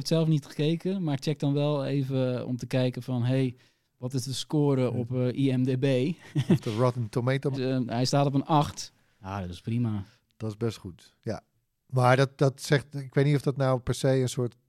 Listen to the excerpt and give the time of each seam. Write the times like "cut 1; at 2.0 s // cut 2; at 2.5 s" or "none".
cut 1; at 7.5 s